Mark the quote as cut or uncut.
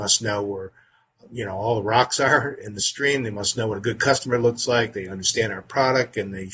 uncut